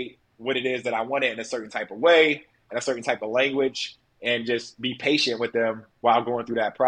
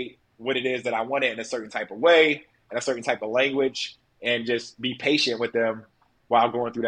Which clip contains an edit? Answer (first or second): first